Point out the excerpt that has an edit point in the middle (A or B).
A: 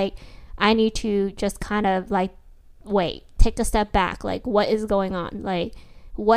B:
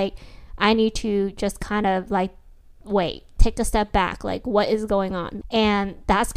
B